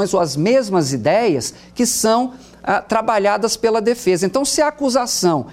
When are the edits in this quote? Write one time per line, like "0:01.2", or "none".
none